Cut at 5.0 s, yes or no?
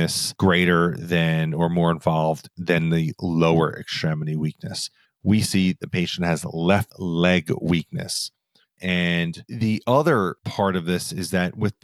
yes